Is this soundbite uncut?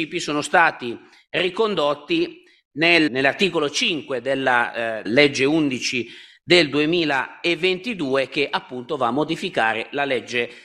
no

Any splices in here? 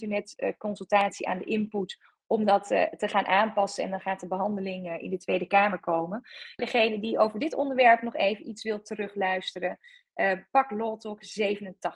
yes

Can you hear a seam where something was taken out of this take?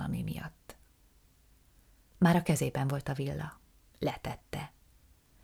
no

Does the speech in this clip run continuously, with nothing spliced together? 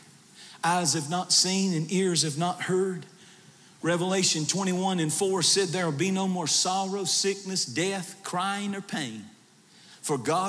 yes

